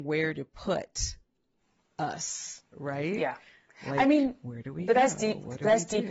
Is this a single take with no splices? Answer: yes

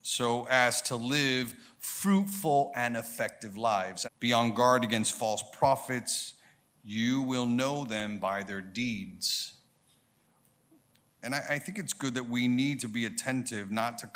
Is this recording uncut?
no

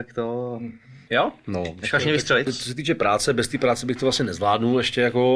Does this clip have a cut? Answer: yes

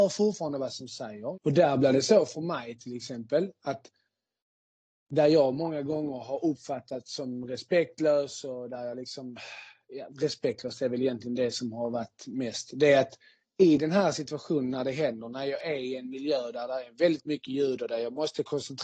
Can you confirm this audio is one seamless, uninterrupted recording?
no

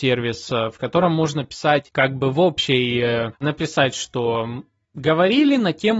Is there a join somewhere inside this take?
yes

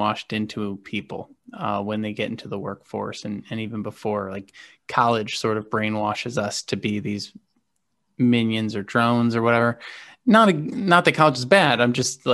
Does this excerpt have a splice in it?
no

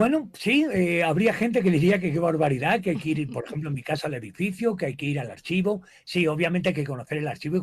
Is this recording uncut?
yes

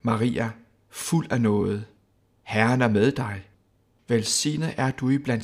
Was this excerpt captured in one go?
yes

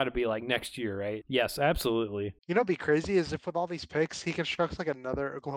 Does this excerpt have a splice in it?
yes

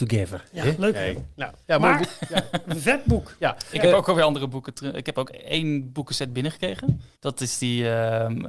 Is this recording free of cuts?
no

